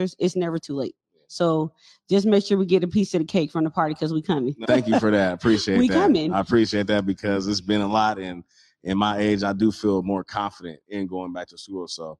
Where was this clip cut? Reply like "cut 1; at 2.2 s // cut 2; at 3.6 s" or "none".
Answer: cut 1; at 4.6 s